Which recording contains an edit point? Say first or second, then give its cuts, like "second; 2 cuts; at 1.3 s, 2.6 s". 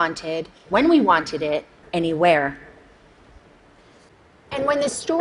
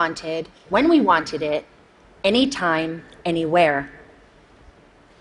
first; 1 cut; at 1.8 s